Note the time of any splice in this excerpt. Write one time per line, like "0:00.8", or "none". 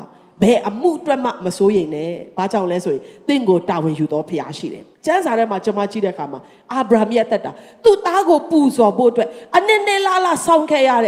0:04.9

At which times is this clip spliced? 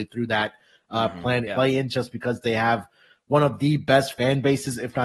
0:01.5

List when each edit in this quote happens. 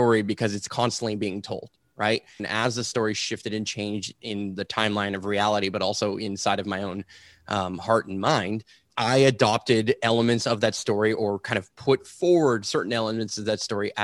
0:02.4
0:08.9

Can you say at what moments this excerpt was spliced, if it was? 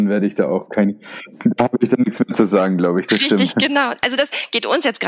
none

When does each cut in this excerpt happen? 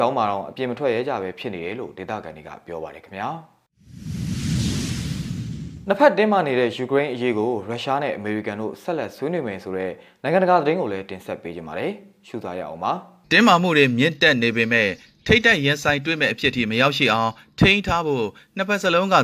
0:13.2

